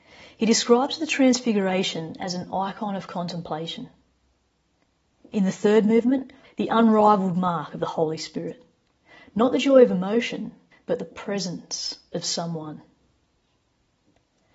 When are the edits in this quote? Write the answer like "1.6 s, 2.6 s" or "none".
5.2 s, 6.4 s

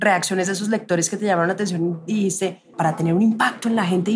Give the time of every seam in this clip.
2.7 s

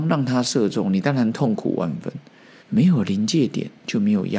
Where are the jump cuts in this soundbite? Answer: 2.6 s

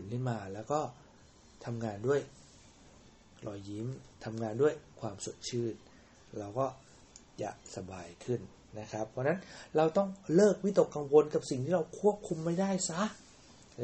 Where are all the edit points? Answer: none

